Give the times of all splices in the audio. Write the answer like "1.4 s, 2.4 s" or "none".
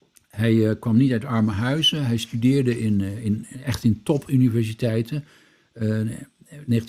none